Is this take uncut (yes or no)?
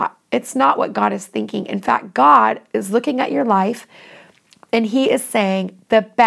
yes